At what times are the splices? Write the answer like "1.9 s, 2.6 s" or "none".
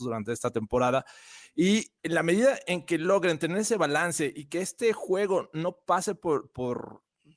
2.0 s